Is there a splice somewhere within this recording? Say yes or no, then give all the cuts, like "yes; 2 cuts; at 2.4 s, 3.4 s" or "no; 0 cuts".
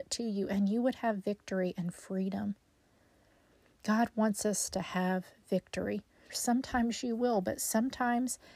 yes; 1 cut; at 6.3 s